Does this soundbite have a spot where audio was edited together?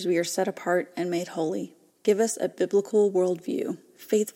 yes; 1 cut; at 1.9 s

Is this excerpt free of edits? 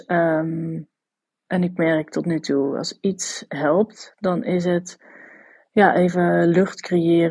yes; 0 cuts

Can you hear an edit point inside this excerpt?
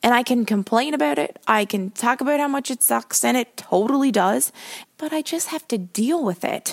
yes; 1 cut; at 4.8 s

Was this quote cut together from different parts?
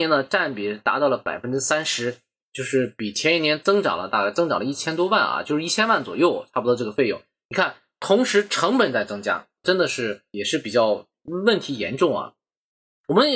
yes; 1 cut; at 9.6 s

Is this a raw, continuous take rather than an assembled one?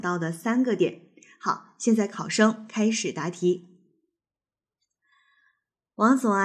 yes; 0 cuts

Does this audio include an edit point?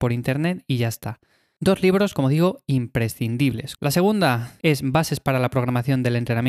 yes; 1 cut; at 3.8 s

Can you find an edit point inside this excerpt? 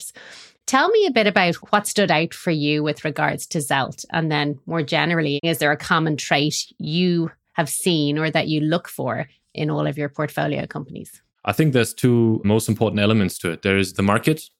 no; 0 cuts

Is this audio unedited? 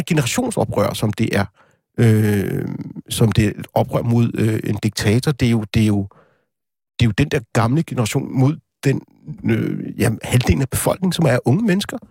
yes; 0 cuts

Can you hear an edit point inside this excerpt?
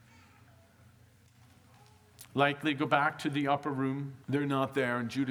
yes; 1 cut; at 4.2 s

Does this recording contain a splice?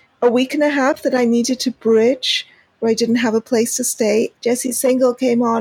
yes; 1 cut; at 4.3 s

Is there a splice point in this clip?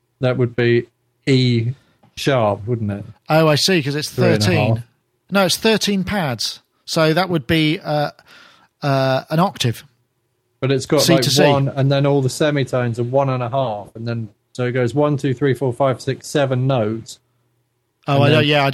no; 0 cuts

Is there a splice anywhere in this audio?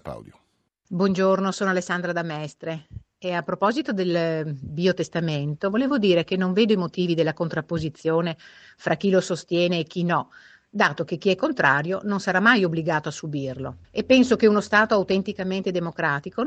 yes; 1 cut; at 13.8 s

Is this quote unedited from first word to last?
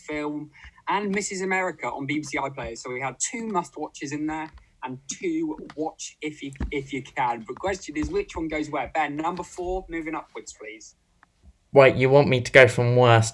yes; 0 cuts

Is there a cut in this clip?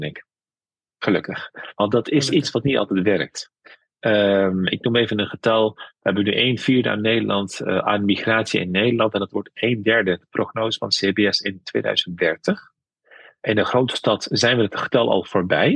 no; 0 cuts

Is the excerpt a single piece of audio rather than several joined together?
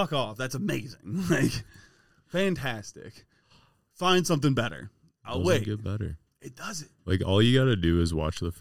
yes; 0 cuts

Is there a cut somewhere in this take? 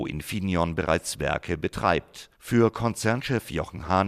yes; 1 cut; at 2.3 s

